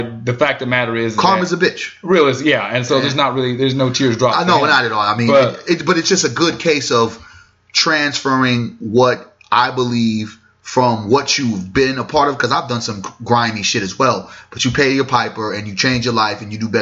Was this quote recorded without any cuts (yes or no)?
yes